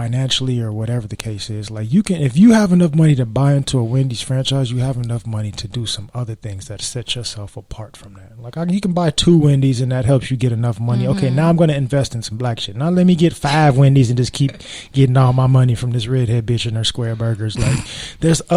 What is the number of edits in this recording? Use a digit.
0